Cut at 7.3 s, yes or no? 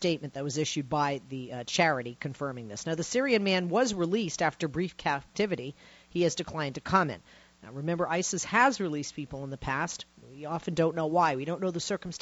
no